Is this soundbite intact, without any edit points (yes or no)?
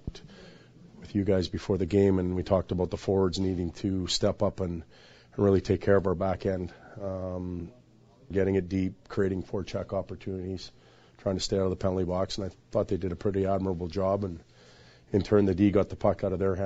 no